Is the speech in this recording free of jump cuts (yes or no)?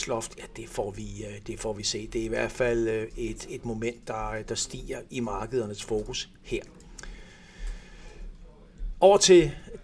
yes